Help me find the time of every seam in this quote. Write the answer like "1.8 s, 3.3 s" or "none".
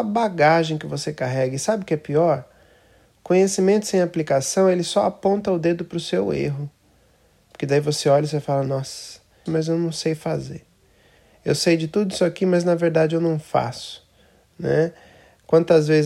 9.5 s